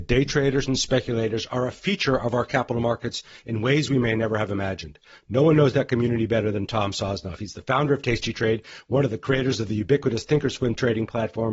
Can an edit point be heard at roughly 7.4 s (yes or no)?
no